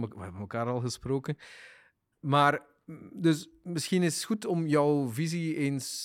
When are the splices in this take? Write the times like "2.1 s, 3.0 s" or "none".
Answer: 2.1 s